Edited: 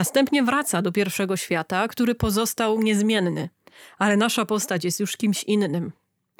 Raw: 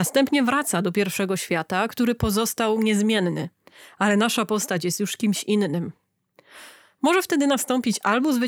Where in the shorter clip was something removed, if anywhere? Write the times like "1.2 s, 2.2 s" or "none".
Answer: none